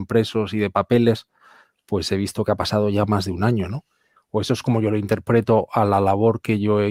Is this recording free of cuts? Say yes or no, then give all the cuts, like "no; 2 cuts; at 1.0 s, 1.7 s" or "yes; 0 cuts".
no; 1 cut; at 4.2 s